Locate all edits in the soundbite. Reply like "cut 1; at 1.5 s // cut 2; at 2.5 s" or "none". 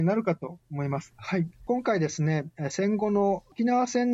cut 1; at 1.1 s